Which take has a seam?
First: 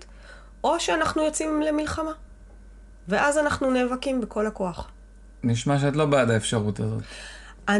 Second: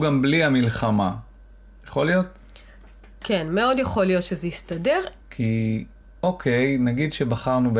second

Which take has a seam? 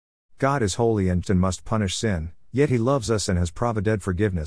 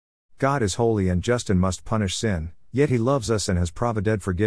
first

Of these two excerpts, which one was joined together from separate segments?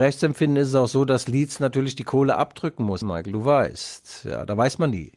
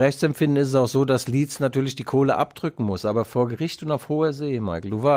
first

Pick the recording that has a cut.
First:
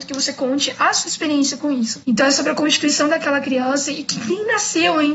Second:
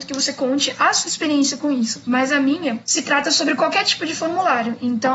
first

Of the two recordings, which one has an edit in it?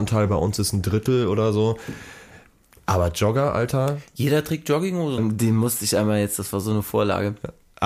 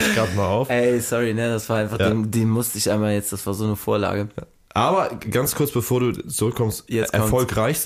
first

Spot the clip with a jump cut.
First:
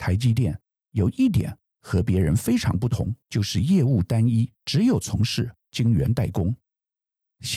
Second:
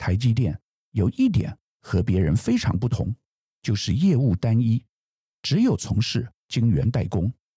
first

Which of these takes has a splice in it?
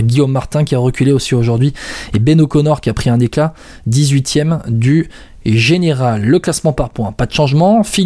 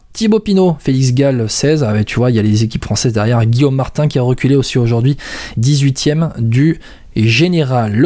second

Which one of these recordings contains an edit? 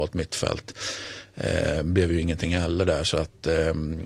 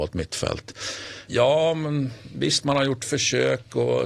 second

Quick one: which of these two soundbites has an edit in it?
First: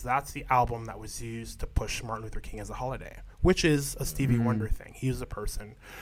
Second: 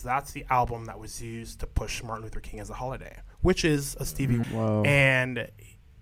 second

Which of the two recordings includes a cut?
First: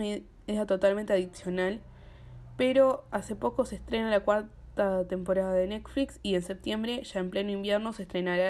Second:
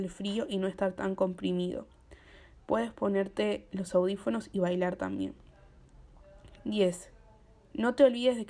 second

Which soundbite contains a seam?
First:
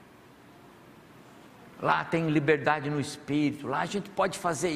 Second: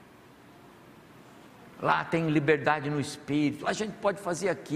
second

